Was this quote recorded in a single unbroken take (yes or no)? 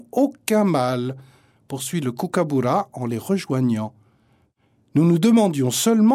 yes